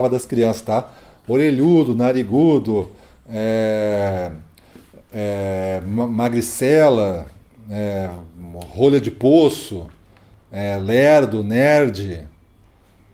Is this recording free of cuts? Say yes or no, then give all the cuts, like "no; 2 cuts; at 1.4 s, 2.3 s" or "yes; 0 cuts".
yes; 0 cuts